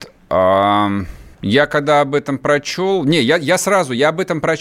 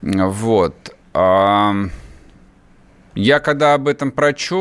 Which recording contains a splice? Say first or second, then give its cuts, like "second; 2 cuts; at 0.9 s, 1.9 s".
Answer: first; 1 cut; at 1.3 s